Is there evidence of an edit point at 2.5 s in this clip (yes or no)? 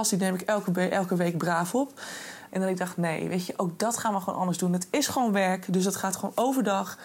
yes